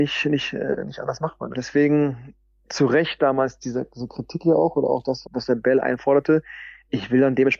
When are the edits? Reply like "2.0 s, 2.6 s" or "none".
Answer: 1.5 s, 5.2 s

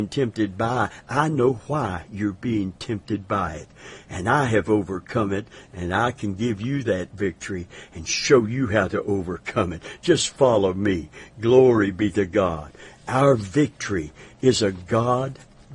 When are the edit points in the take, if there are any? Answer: none

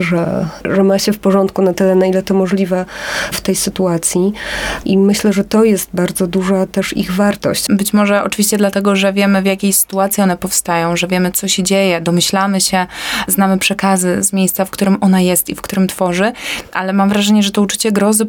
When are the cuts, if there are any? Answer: 4.8 s, 7.7 s

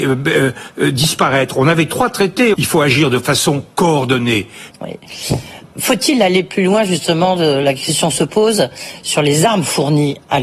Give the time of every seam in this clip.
2.5 s, 4.7 s

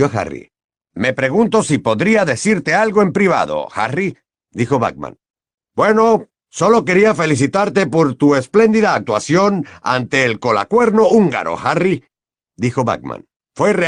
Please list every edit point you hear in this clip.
5.6 s

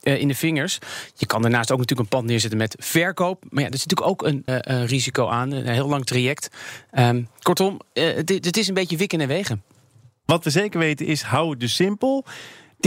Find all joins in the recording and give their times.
4.5 s

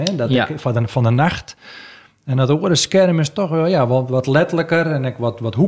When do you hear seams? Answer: none

